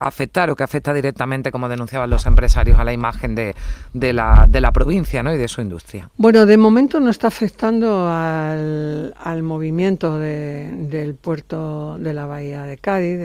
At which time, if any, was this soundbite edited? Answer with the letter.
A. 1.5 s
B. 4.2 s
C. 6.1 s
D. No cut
D